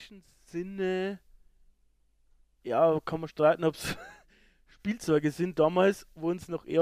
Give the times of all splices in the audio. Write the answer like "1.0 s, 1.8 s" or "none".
none